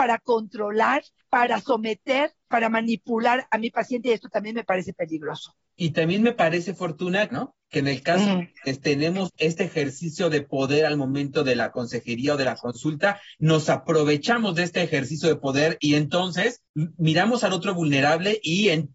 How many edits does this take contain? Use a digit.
1